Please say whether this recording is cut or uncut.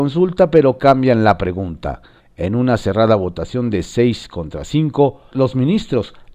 cut